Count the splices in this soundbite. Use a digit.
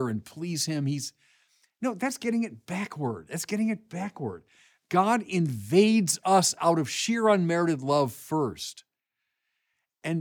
0